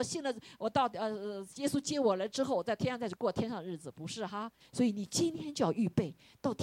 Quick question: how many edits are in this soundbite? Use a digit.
2